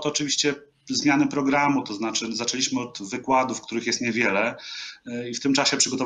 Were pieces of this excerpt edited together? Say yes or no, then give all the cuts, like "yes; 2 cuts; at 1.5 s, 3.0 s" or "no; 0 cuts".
no; 0 cuts